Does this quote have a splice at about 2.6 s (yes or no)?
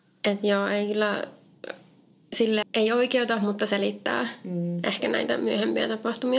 yes